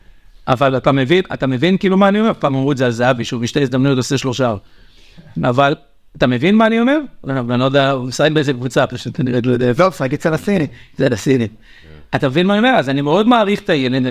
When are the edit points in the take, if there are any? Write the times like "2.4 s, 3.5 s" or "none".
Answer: none